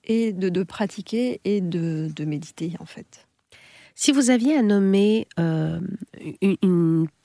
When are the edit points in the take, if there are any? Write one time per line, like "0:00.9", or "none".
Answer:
none